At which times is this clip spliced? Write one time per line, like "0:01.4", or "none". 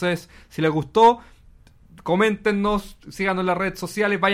none